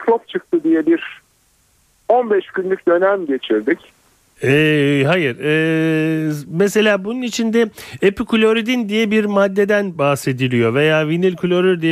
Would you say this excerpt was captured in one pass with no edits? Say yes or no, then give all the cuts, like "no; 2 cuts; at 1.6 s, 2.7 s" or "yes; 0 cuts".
no; 1 cut; at 4.4 s